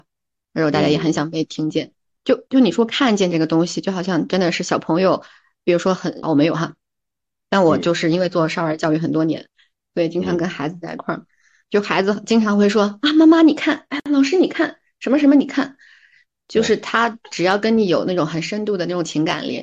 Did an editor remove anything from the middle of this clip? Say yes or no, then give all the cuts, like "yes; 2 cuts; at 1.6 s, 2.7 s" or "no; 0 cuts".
yes; 1 cut; at 6.2 s